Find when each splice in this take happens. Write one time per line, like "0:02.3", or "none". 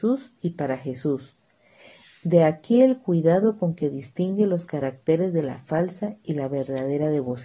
none